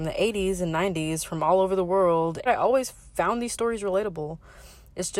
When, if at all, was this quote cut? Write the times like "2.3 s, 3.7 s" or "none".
2.5 s